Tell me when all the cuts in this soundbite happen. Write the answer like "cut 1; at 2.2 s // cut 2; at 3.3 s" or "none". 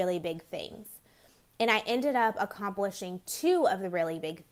none